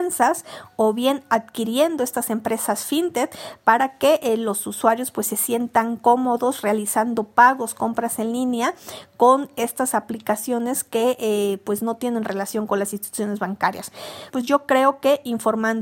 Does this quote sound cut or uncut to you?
cut